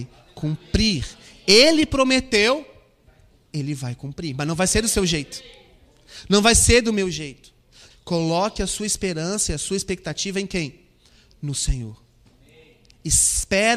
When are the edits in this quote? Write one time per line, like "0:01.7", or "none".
0:07.9